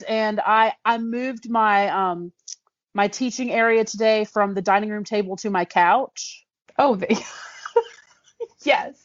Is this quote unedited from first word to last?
yes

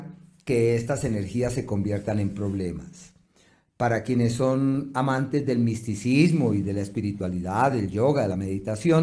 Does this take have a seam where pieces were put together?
no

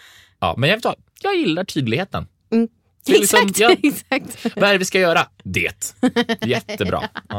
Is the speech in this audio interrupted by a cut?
no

